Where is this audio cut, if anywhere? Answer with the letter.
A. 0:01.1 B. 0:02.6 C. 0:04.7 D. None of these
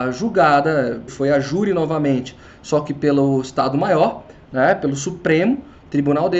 A